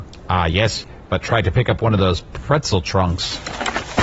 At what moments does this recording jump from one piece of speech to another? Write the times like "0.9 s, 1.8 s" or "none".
none

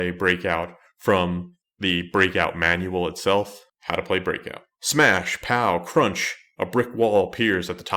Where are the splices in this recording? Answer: none

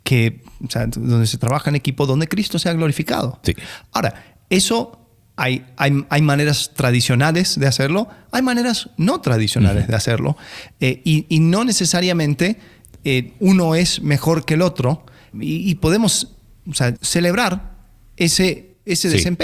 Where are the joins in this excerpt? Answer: 15.3 s, 17.0 s

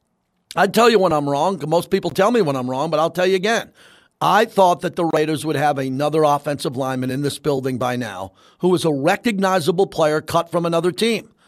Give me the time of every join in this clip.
none

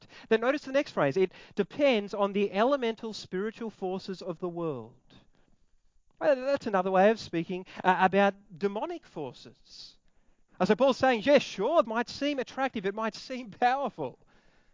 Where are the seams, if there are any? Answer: 10.5 s, 11.8 s

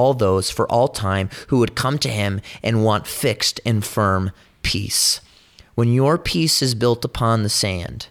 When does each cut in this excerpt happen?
none

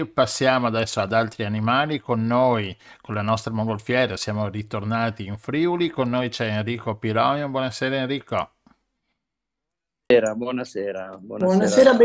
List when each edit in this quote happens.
none

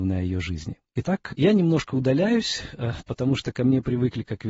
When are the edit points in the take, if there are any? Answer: none

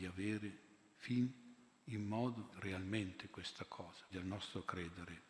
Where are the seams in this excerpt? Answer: 2.5 s, 4.1 s

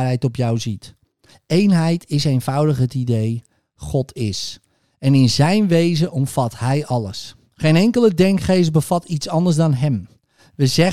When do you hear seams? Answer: none

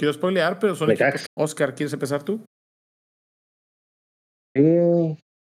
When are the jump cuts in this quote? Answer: 1.3 s

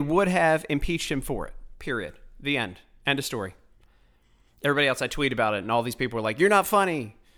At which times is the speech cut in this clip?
none

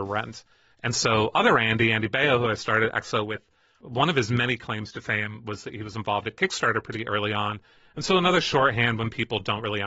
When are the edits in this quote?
none

